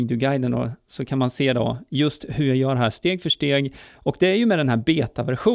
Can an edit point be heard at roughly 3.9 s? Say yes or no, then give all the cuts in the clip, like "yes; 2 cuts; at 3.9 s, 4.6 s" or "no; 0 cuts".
no; 0 cuts